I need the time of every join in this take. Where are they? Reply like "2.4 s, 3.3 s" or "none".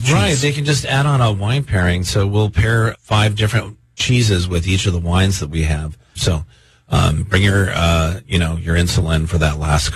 2.9 s, 6.2 s